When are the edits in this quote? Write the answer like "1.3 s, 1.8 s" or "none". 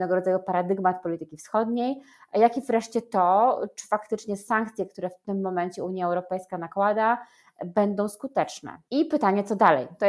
none

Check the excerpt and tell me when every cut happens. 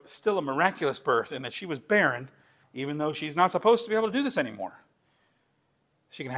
2.6 s

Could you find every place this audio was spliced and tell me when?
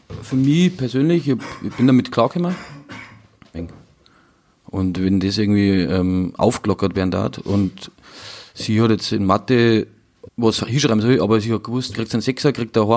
3.5 s, 10.3 s, 11.9 s

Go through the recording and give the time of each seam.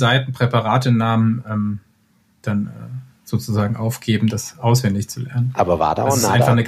none

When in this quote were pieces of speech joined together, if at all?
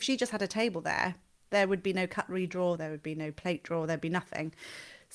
2.8 s

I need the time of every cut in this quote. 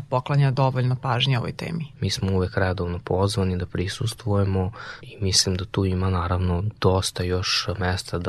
1.9 s

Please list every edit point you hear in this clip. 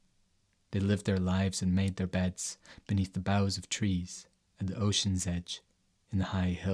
none

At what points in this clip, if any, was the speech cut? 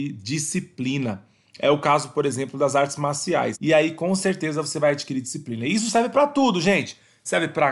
3.5 s

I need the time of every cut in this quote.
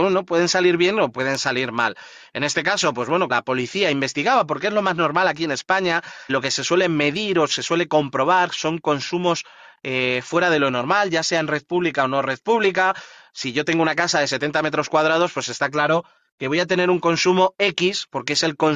3.3 s, 6.3 s

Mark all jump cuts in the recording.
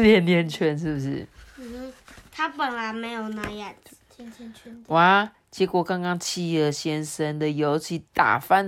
none

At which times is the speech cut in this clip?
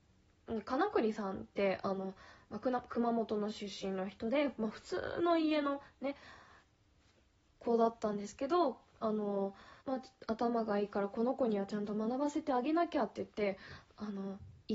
9.8 s

